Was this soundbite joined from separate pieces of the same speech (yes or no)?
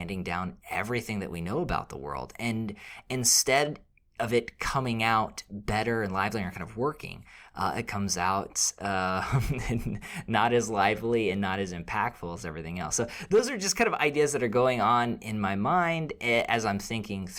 no